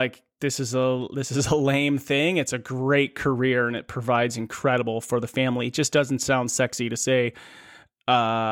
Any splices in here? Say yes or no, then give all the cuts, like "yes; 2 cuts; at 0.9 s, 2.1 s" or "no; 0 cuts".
no; 0 cuts